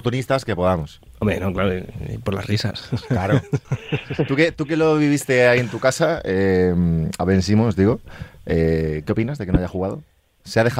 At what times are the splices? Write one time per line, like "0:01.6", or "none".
0:03.6